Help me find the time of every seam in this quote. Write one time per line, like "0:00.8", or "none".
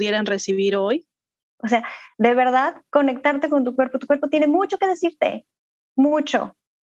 0:01.4